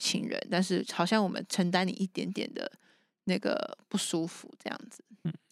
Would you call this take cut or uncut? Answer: uncut